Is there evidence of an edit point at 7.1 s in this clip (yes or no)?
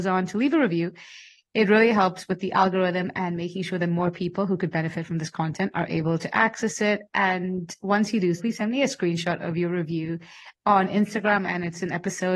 no